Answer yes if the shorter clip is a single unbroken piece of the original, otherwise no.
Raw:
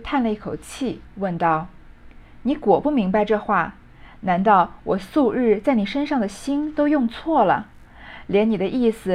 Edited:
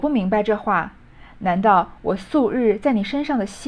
yes